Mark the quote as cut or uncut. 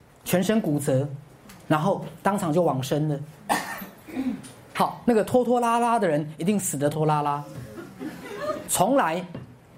cut